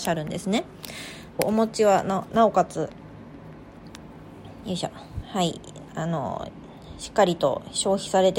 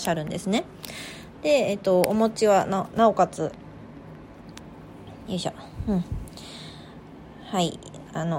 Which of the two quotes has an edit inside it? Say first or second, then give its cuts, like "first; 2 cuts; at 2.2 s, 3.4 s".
first; 2 cuts; at 1.4 s, 5.2 s